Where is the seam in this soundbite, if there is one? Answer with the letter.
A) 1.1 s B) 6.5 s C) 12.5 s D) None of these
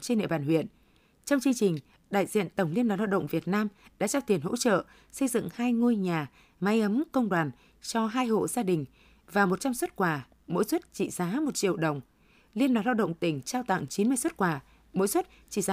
D